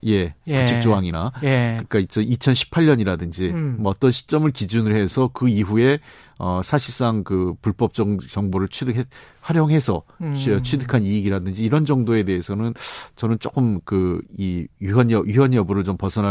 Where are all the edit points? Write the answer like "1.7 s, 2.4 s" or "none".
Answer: 1.8 s